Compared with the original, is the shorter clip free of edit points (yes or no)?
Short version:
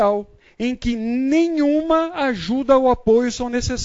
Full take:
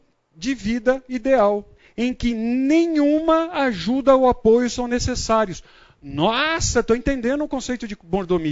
yes